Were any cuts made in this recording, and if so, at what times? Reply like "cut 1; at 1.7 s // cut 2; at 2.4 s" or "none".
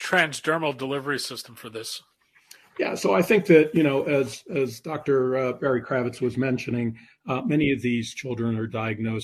none